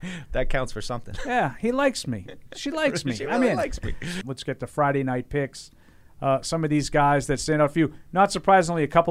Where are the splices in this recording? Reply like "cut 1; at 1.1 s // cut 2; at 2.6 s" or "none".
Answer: cut 1; at 4.2 s

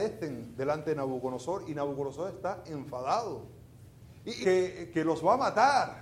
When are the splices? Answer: cut 1; at 4.4 s

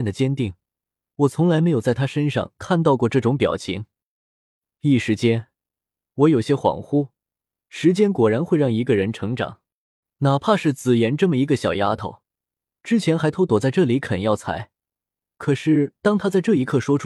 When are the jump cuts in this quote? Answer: cut 1; at 13.3 s

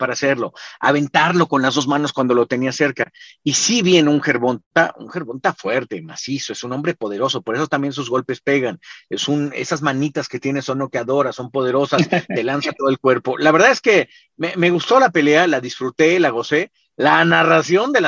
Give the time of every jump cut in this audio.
none

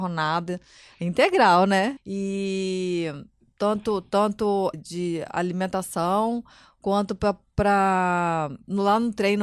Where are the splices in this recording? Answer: cut 1; at 2.0 s // cut 2; at 4.7 s

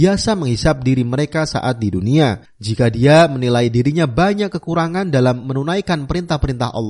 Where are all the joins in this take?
cut 1; at 2.5 s

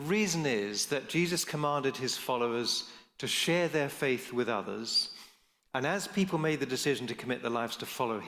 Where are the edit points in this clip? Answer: none

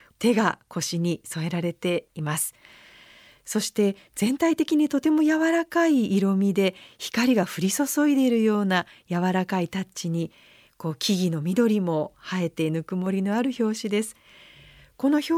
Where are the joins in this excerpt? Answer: none

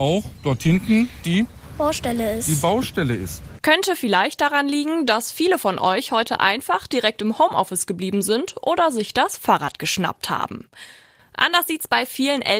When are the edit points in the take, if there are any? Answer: cut 1; at 3.6 s

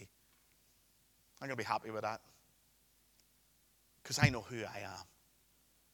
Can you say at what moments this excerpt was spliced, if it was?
none

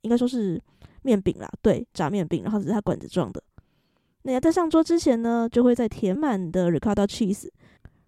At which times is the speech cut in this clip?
cut 1; at 6.2 s

